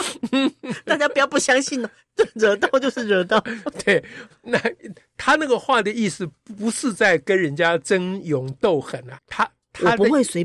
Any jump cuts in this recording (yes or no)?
yes